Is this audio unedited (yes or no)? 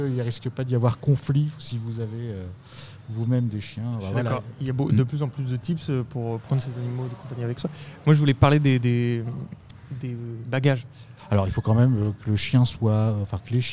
no